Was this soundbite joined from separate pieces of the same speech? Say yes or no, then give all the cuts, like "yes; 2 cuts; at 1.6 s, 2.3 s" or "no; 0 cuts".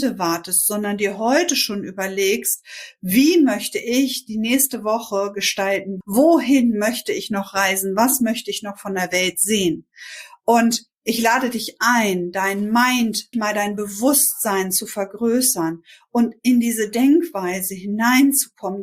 yes; 3 cuts; at 6.0 s, 10.9 s, 13.3 s